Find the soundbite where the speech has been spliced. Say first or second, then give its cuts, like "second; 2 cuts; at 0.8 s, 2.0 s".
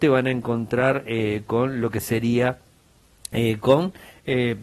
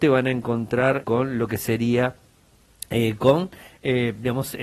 second; 1 cut; at 1.0 s